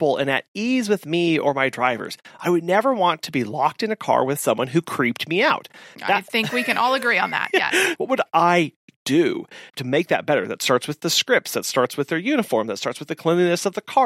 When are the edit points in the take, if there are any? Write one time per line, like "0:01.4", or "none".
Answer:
0:08.0
0:09.7